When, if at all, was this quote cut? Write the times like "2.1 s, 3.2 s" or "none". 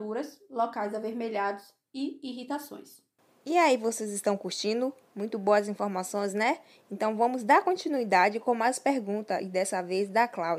none

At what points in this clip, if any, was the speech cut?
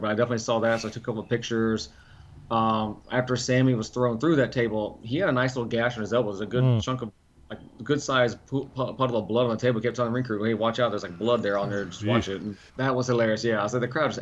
12.7 s

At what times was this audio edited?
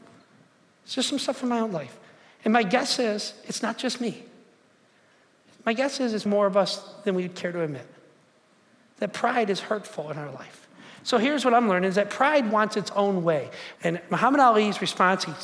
6.3 s, 13.8 s

